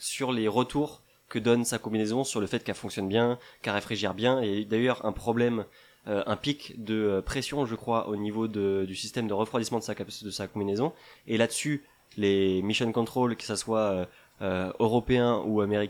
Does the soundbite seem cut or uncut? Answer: uncut